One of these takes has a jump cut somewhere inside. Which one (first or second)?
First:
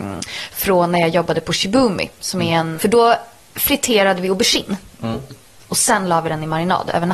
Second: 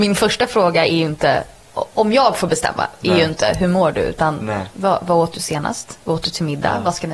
first